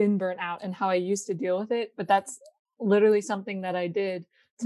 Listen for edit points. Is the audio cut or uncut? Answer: uncut